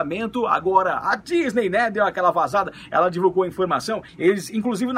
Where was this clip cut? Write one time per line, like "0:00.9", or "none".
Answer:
0:04.1